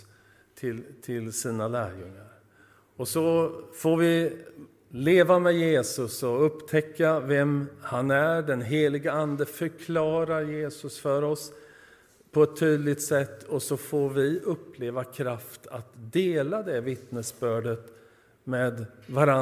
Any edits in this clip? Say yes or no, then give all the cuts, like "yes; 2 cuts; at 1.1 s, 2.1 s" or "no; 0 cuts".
no; 0 cuts